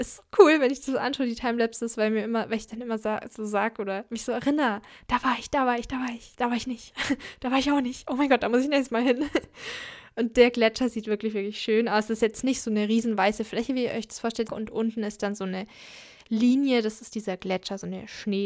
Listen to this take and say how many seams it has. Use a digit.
1